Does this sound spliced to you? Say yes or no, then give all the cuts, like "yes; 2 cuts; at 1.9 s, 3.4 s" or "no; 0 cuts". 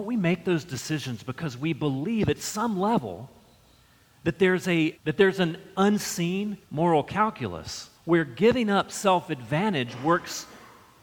yes; 3 cuts; at 4.9 s, 6.6 s, 7.9 s